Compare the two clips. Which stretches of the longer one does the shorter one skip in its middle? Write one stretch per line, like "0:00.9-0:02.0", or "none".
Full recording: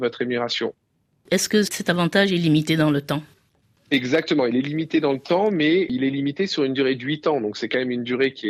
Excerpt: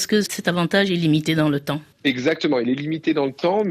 0:03.3-0:03.8